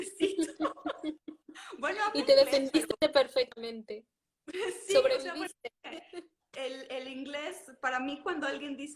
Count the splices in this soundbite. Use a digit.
0